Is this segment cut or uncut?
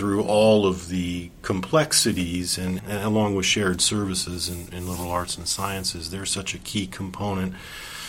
cut